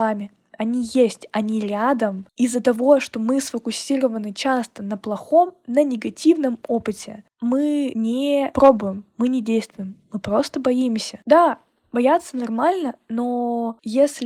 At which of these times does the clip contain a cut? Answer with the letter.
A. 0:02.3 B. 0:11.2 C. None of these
C